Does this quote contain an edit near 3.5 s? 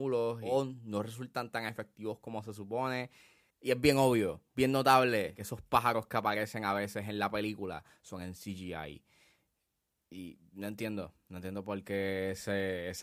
yes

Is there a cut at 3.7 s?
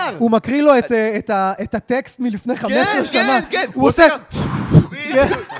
no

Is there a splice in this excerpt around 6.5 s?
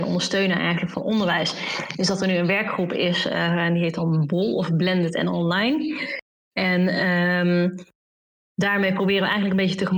no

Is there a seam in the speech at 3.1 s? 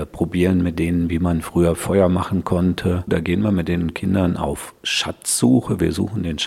yes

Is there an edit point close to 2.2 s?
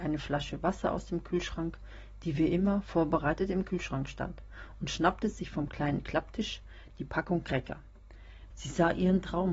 no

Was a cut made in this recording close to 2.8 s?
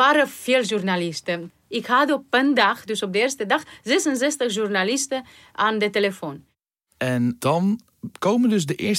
no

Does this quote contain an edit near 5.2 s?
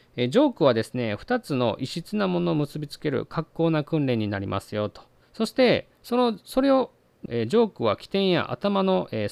yes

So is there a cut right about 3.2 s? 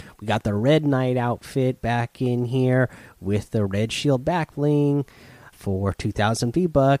no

